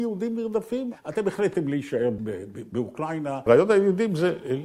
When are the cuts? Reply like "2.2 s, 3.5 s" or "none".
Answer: 2.2 s, 3.5 s